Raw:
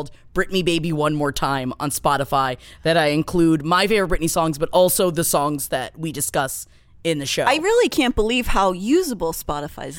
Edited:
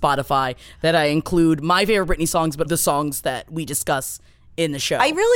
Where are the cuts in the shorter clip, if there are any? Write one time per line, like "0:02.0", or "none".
0:02.6